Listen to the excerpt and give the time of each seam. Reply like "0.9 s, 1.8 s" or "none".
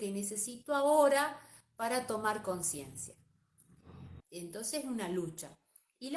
4.2 s